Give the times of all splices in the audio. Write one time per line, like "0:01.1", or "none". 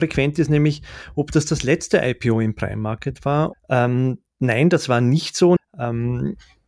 0:03.5
0:05.6